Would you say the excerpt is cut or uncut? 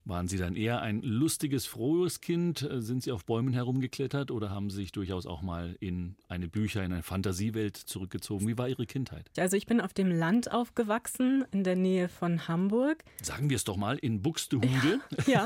cut